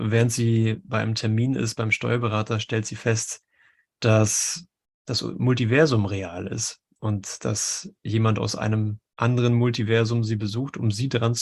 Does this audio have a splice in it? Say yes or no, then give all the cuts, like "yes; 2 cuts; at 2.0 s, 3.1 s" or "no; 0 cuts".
no; 0 cuts